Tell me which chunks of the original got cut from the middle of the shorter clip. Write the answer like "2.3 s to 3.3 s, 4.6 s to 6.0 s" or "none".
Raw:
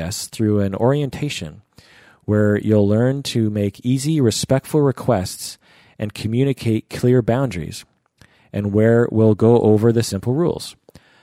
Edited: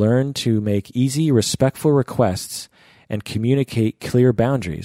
none